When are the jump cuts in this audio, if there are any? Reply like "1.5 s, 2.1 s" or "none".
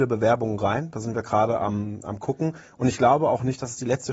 none

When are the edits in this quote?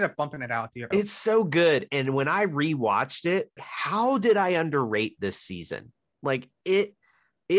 0.9 s, 3.6 s

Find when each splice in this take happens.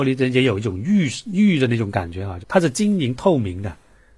2.4 s

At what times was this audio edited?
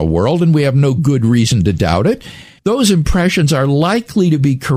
2.6 s

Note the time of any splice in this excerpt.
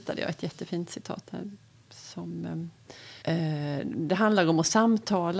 3.2 s

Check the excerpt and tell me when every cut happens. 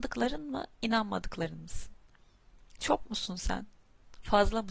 2.8 s

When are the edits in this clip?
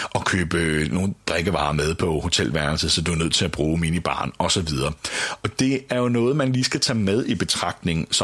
none

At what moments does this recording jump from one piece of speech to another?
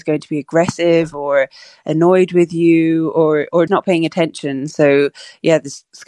3.7 s

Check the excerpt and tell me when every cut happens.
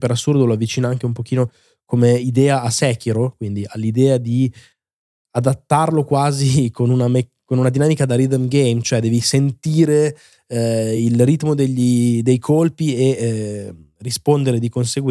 none

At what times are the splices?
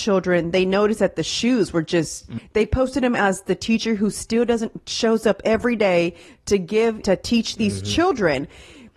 2.4 s, 7.0 s

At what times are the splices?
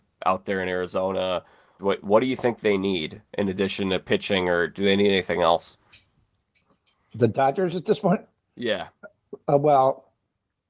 1.8 s

